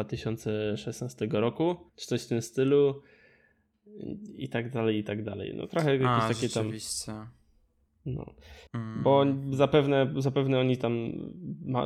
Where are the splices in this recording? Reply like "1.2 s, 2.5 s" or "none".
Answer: 1.9 s, 8.7 s